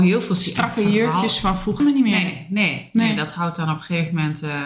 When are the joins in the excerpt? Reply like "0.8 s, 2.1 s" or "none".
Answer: 1.8 s